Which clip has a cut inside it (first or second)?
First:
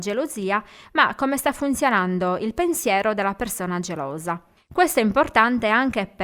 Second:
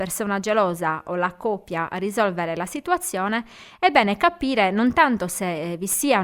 first